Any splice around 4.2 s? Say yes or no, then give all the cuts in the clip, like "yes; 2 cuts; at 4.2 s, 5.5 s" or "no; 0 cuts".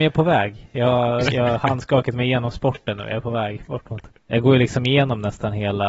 yes; 2 cuts; at 1.3 s, 4.2 s